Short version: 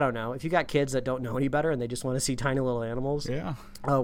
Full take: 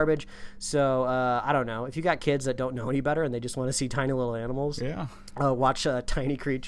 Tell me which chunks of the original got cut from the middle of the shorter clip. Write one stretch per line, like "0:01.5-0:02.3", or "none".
none